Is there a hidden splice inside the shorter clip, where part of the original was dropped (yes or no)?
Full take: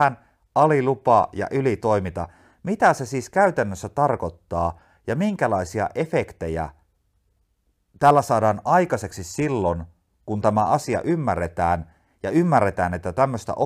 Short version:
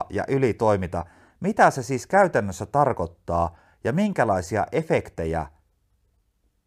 no